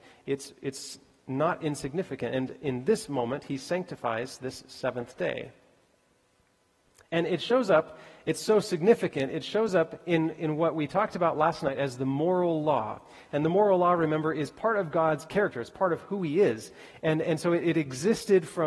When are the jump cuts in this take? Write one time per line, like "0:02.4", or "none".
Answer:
none